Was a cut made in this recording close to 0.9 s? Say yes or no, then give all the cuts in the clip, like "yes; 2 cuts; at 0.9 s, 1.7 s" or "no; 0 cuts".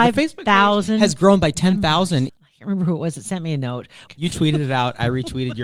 no; 2 cuts; at 2.3 s, 4.1 s